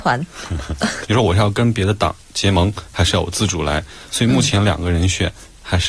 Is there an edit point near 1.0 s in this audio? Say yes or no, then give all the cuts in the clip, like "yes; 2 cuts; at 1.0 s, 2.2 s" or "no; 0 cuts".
yes; 1 cut; at 1.0 s